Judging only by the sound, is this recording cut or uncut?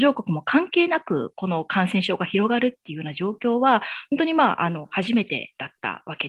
uncut